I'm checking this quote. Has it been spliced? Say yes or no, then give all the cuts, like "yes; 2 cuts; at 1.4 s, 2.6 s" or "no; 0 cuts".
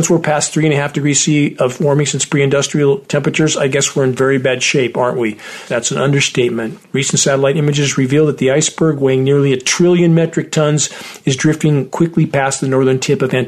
yes; 2 cuts; at 5.7 s, 6.8 s